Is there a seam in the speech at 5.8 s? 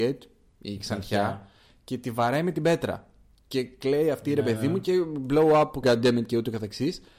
yes; 1 cut; at 5.8 s

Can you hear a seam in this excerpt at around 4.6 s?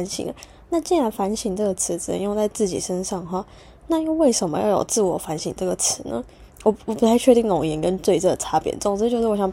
no; 1 cut; at 6.5 s

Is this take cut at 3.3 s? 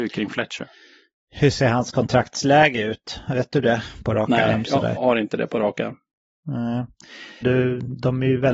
no; 2 cuts; at 5.0 s, 7.4 s

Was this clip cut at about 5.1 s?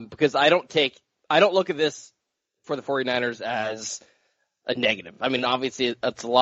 no; 0 cuts

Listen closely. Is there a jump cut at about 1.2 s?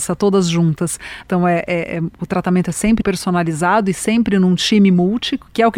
yes; 2 cuts; at 1.2 s, 3.0 s

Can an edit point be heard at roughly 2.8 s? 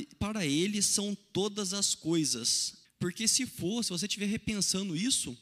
yes; 1 cut; at 2.8 s

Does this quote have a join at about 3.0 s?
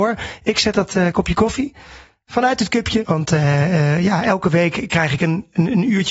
yes; 1 cut; at 3.0 s

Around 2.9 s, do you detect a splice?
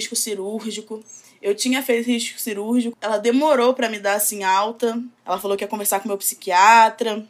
yes; 2 cuts; at 2.9 s, 5.2 s

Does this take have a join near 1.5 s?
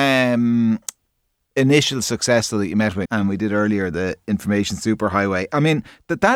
no; 1 cut; at 3.1 s

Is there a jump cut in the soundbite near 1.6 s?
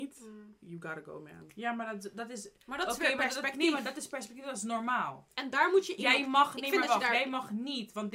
no; 0 cuts

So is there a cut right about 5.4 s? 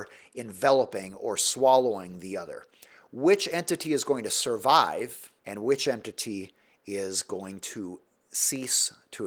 yes; 1 cut; at 5.4 s

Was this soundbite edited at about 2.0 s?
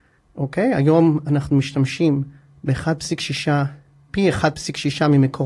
no; 1 cut; at 4.1 s

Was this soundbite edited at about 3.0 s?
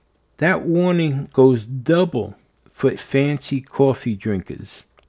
yes; 1 cut; at 3.0 s

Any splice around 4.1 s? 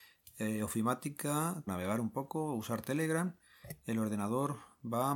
no; 1 cut; at 1.7 s

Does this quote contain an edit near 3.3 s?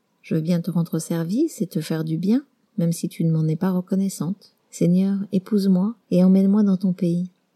no; 2 cuts; at 4.6 s, 6.0 s

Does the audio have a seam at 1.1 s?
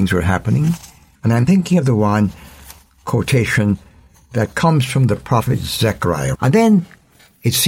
yes; 2 cuts; at 1.1 s, 6.3 s

